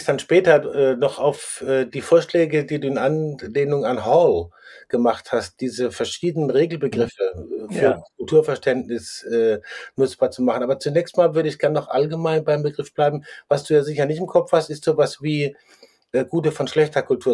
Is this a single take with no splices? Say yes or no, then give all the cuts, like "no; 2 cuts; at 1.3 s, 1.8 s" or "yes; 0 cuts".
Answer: yes; 0 cuts